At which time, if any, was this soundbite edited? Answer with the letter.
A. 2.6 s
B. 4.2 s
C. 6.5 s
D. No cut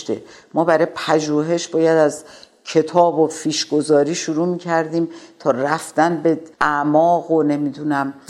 C